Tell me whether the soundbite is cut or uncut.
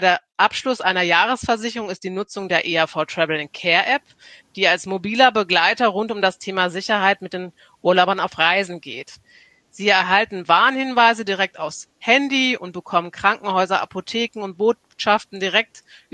uncut